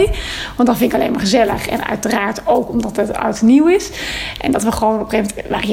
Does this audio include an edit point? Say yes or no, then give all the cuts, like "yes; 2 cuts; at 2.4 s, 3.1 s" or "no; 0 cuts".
no; 0 cuts